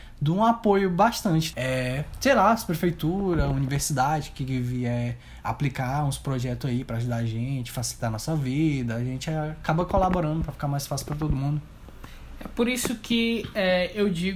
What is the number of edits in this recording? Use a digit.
1